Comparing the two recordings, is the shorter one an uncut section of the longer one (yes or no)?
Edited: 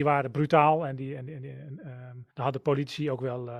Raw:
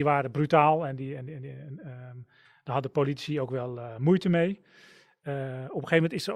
no